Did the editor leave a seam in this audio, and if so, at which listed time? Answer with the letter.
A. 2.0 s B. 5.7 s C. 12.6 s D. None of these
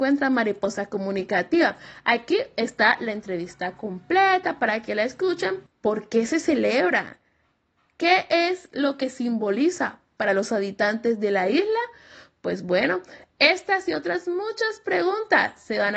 B